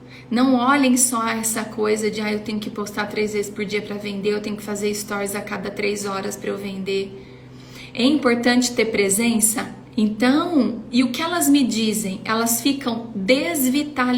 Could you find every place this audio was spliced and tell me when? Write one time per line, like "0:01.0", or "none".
0:09.9